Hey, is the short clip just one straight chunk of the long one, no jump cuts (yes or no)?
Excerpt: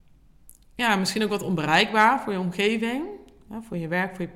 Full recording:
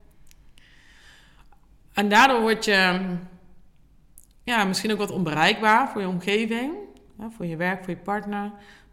yes